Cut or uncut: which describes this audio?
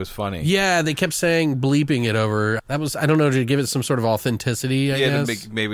cut